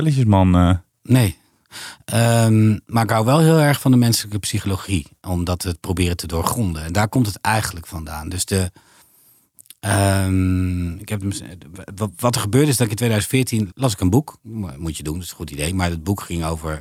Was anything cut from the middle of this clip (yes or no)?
yes